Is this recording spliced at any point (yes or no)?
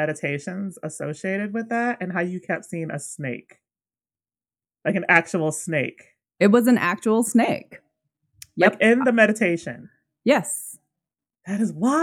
no